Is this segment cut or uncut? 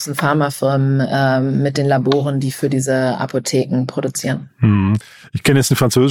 uncut